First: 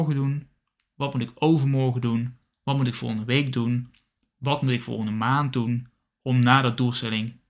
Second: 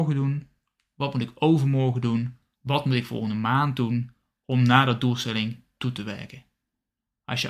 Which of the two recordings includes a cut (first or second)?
second